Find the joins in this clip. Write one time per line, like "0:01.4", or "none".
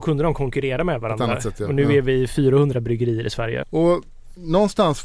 0:03.6